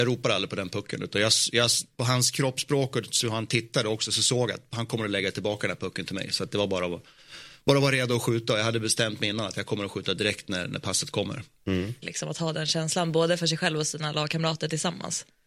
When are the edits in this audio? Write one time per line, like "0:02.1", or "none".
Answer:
0:12.0